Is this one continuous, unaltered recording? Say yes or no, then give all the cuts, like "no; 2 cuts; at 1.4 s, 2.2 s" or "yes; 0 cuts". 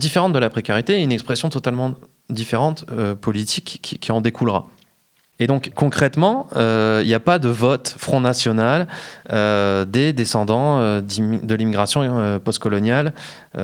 yes; 0 cuts